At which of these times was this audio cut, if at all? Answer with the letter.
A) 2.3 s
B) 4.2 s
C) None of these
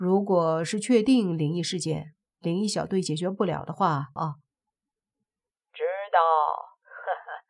B